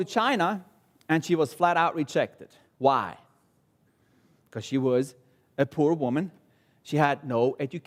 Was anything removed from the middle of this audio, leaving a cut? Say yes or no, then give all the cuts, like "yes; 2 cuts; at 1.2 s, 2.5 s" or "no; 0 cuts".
no; 0 cuts